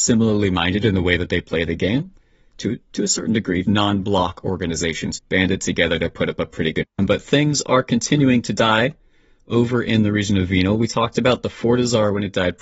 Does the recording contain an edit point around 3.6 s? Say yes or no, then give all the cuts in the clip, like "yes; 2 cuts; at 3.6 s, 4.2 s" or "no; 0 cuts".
yes; 2 cuts; at 3.6 s, 6.9 s